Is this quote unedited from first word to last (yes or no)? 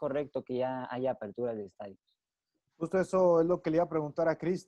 yes